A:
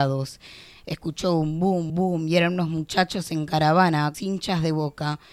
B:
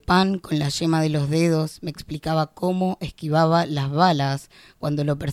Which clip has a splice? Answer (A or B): A